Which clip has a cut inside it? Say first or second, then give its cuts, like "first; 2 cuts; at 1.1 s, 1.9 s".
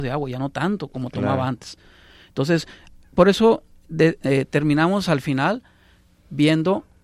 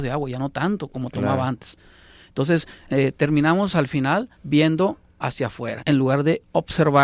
second; 3 cuts; at 2.8 s, 4.3 s, 5.8 s